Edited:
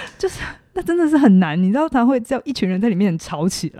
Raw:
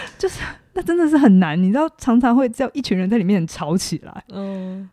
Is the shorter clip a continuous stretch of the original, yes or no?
no